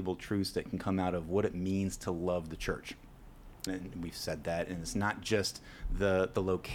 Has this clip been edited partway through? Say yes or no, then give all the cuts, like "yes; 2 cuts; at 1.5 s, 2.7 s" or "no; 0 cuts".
yes; 1 cut; at 3.7 s